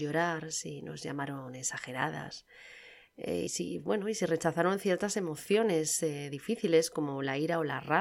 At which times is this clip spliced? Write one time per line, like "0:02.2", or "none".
0:03.5